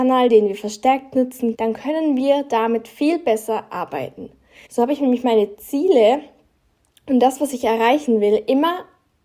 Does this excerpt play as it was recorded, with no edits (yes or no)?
no